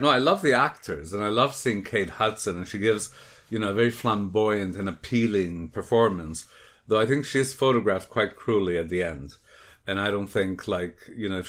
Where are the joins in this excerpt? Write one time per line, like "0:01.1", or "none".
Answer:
none